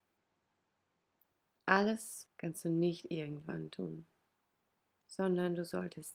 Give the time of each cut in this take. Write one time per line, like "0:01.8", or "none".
0:02.3